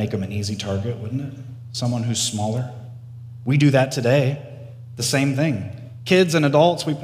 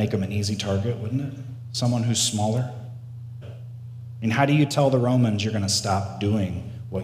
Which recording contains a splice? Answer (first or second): second